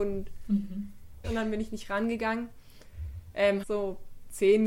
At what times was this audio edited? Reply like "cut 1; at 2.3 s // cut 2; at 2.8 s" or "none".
cut 1; at 1.2 s // cut 2; at 3.6 s